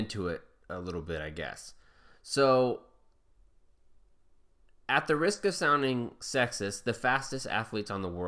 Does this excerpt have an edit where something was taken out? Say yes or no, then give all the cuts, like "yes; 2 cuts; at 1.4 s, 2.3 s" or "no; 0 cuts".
no; 0 cuts